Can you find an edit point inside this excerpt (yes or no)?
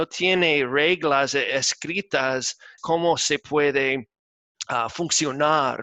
yes